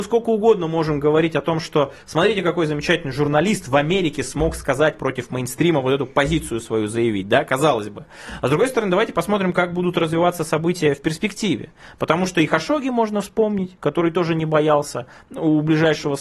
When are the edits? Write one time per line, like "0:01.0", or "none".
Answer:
none